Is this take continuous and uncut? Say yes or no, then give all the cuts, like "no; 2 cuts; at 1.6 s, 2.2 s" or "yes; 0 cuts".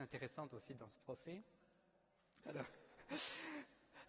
no; 1 cut; at 2.4 s